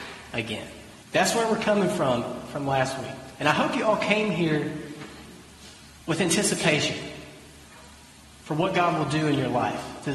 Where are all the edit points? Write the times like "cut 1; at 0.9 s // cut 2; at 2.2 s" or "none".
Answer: cut 1; at 1.0 s